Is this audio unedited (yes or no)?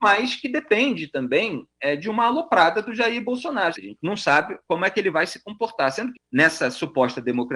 no